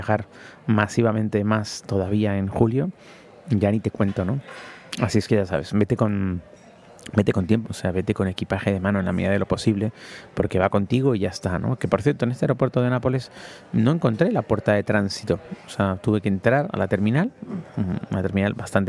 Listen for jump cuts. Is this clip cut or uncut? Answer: cut